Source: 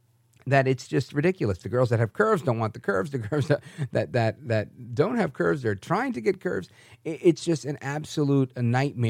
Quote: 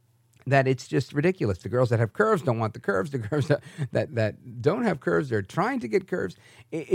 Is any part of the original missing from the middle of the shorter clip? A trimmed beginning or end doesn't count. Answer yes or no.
yes